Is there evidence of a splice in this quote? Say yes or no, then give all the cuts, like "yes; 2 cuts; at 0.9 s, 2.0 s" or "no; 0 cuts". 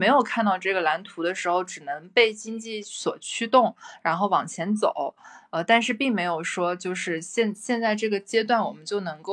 no; 0 cuts